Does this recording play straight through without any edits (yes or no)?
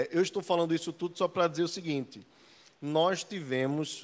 yes